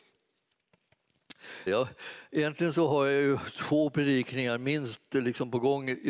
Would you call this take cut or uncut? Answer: cut